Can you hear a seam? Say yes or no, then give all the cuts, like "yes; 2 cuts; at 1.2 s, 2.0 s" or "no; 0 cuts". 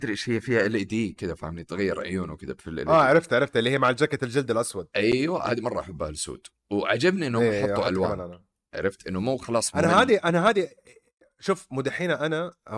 no; 0 cuts